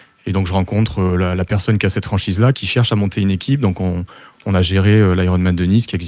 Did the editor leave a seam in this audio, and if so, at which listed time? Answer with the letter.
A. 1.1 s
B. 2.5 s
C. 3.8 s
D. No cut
B